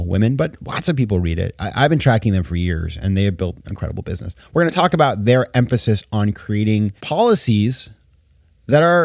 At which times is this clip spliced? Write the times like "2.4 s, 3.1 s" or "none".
3.7 s, 7.0 s

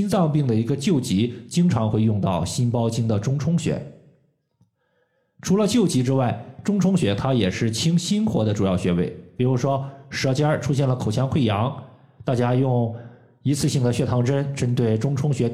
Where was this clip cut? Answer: none

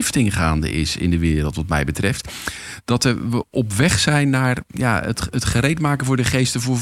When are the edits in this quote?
none

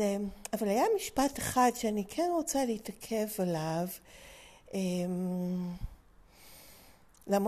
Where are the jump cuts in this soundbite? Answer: none

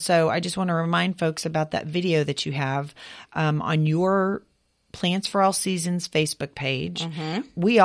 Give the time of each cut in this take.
none

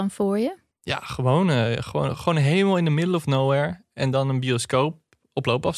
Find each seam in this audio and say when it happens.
none

